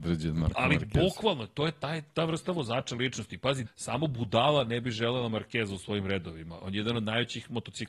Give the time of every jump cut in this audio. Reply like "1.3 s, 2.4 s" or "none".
3.7 s